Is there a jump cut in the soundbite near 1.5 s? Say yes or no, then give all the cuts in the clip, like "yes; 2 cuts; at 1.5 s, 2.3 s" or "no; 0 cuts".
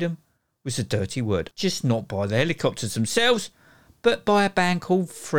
yes; 1 cut; at 1.5 s